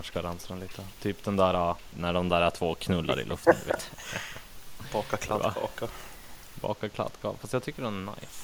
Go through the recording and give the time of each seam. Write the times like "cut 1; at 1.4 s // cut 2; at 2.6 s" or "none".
cut 1; at 1.9 s